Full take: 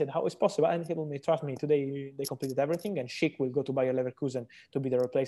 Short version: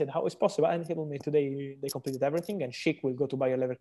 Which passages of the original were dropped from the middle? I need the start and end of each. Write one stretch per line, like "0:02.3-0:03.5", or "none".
0:01.2-0:01.6